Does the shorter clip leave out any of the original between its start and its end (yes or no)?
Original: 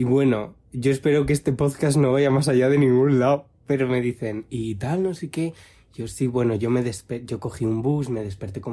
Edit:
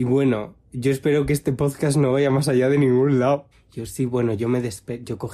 yes